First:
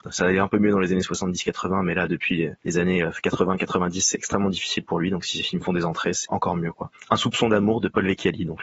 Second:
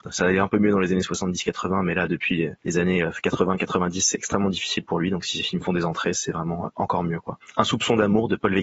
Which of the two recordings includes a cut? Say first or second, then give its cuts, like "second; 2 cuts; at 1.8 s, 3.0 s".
first; 1 cut; at 6.3 s